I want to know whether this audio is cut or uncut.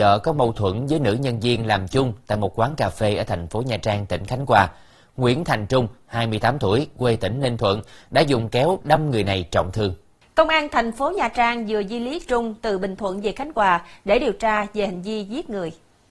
uncut